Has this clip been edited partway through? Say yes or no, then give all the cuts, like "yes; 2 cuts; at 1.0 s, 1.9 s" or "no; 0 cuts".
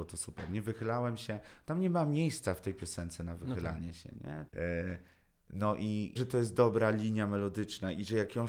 yes; 2 cuts; at 4.5 s, 6.2 s